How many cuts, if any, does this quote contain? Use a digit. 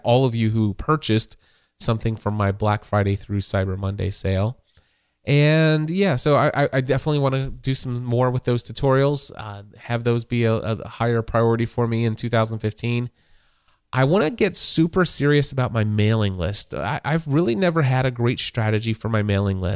0